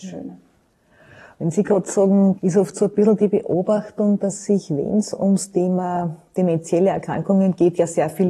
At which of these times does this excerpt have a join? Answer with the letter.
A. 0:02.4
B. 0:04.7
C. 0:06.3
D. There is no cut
A